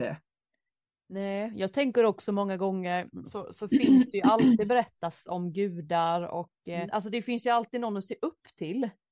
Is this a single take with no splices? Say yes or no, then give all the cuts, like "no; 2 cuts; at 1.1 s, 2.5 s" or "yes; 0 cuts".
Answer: no; 2 cuts; at 3.3 s, 6.9 s